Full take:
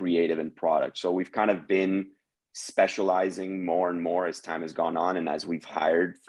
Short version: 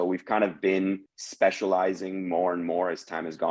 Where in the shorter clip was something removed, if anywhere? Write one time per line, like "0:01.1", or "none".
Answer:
0:01.1